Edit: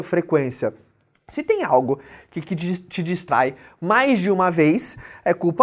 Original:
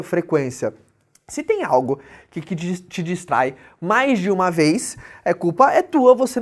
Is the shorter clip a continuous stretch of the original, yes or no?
yes